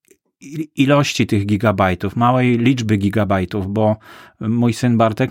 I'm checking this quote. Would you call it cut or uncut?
uncut